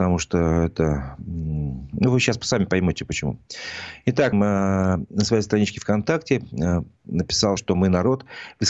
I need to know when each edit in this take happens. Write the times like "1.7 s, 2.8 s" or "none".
4.3 s, 7.6 s